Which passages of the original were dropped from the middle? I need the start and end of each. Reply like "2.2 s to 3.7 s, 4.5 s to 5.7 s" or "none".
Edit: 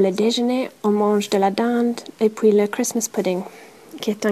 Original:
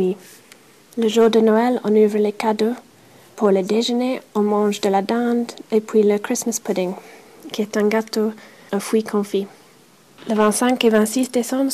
none